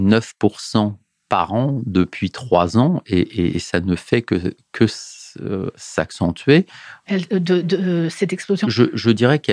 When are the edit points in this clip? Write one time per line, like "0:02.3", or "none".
0:07.0
0:08.6